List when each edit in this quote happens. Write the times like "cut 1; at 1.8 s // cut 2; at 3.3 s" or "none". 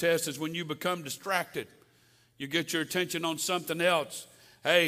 none